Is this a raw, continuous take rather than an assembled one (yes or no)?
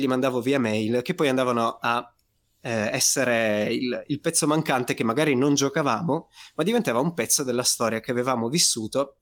yes